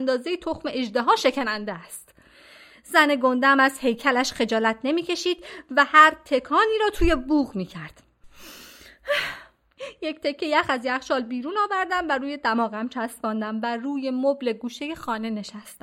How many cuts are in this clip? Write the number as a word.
zero